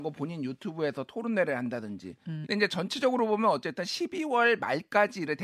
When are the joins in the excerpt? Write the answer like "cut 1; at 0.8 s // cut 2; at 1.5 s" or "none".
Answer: cut 1; at 2.4 s